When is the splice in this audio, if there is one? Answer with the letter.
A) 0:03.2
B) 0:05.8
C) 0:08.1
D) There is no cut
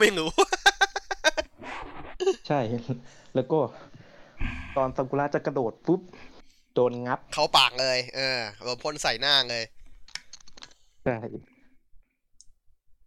B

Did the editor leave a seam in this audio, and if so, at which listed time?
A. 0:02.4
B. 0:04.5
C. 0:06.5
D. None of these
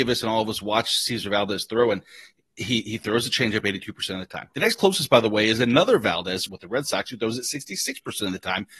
C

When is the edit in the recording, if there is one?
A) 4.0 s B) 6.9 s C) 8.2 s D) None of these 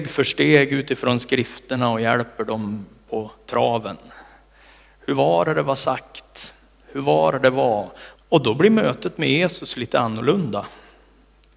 C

